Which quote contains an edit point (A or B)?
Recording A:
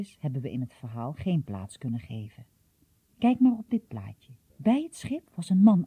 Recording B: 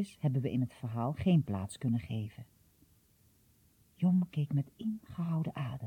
A